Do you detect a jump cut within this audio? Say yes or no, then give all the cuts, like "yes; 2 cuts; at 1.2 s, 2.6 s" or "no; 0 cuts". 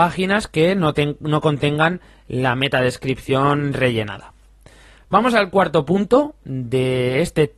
no; 0 cuts